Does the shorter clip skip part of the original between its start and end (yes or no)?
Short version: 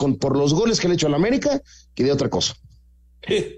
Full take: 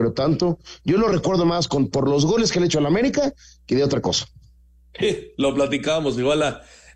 no